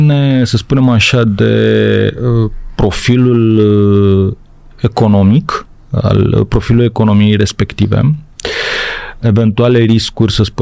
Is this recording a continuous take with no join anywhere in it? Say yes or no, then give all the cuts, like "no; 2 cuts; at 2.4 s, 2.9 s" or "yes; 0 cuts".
no; 1 cut; at 9.2 s